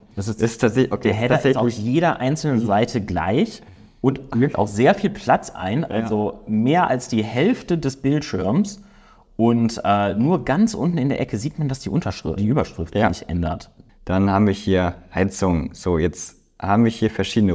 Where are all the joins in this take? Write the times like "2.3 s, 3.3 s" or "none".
12.4 s, 13.9 s